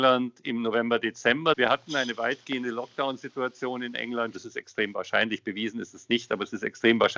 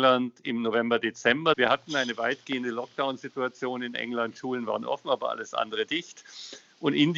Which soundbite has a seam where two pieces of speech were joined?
first; 1 cut; at 4.3 s

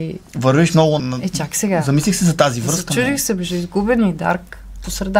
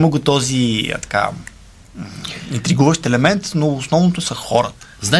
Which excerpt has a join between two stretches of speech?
first; 1 cut; at 1.0 s

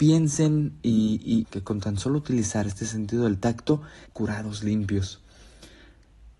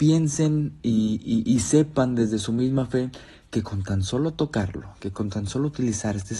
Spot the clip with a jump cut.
first; 2 cuts; at 1.4 s, 4.1 s

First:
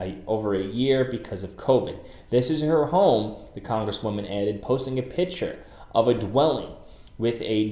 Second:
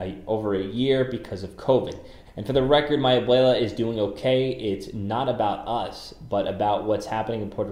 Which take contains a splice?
second; 1 cut; at 2.2 s

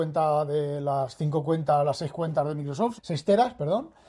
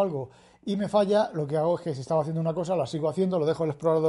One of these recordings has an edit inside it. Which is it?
first; 1 cut; at 3.0 s

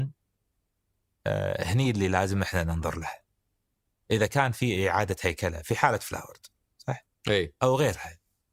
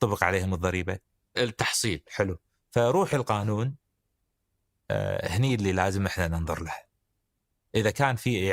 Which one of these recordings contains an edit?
second; 1 cut; at 1.3 s

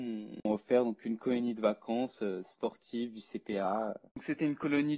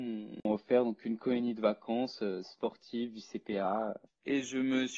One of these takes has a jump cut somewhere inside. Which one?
second; 1 cut; at 4.1 s

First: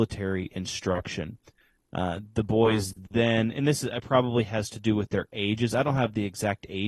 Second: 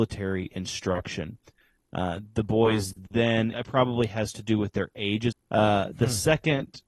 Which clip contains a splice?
second; 2 cuts; at 3.5 s, 5.3 s

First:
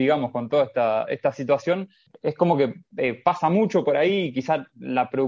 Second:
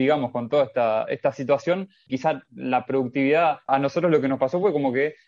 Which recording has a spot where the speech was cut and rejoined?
second; 2 cuts; at 2.1 s, 3.7 s

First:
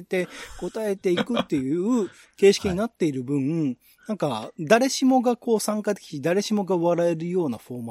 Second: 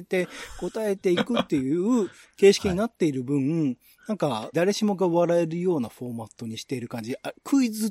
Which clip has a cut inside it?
second; 1 cut; at 4.5 s

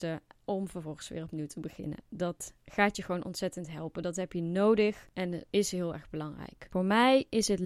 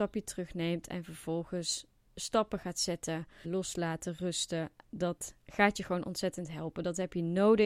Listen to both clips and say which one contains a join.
second; 2 cuts; at 3.4 s, 4.8 s

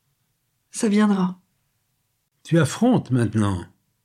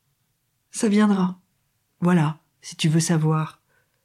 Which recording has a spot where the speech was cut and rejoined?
second; 1 cut; at 1.9 s

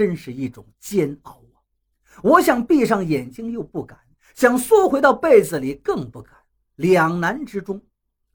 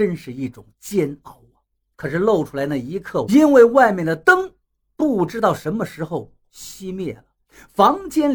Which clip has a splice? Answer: second; 2 cuts; at 1.9 s, 3.3 s

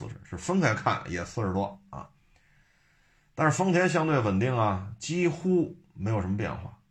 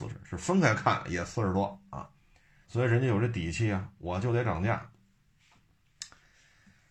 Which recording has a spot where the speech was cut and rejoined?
second; 1 cut; at 2.6 s

